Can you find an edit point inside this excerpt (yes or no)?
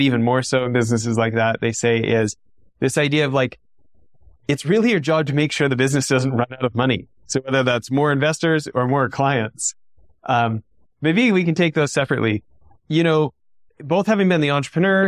no